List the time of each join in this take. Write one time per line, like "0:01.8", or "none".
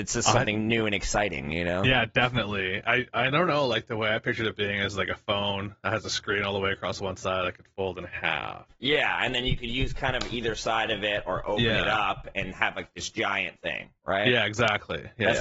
none